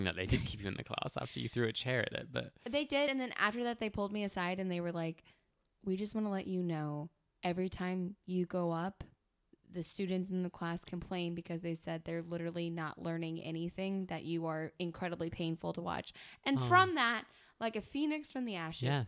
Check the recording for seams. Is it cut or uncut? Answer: uncut